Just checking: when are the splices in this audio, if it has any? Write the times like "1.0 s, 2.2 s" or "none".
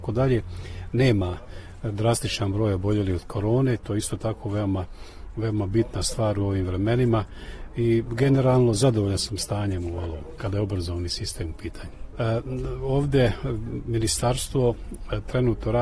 12.1 s

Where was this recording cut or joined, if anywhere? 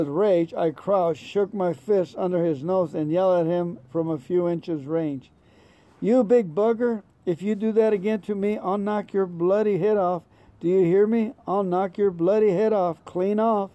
none

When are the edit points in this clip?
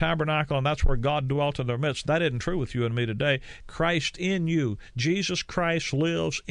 none

